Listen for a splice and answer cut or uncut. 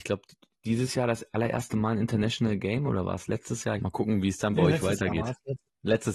cut